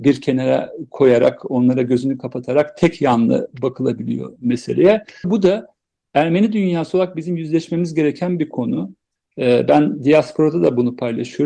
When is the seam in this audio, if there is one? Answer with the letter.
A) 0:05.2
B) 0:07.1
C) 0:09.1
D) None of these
A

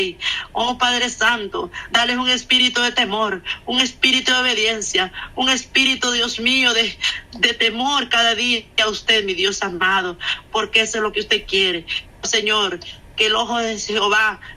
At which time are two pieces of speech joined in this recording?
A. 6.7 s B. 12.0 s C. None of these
B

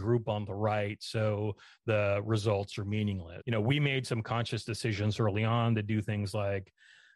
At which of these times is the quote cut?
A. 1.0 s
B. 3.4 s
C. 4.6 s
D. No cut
B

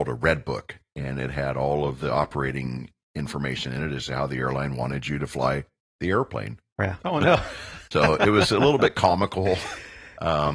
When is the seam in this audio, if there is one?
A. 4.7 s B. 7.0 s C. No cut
B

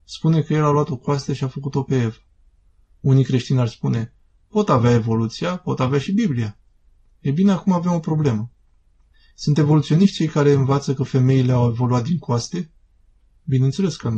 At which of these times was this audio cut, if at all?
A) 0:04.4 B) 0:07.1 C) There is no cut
C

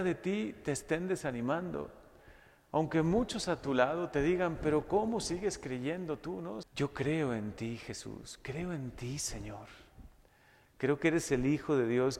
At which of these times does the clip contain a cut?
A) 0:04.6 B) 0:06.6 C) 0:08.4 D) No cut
B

